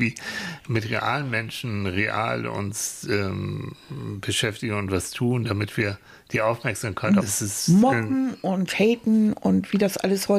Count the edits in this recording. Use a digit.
1